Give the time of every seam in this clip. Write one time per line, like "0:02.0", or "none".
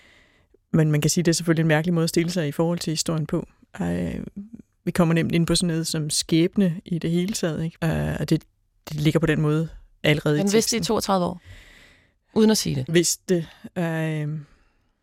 0:07.8
0:12.9